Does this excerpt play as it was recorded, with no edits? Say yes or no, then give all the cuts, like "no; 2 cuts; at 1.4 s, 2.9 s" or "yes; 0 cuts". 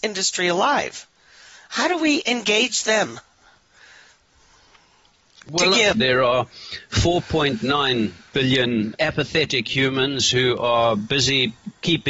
no; 2 cuts; at 5.9 s, 9.0 s